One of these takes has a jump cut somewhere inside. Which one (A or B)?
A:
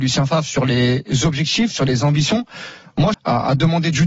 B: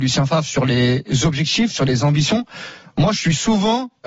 A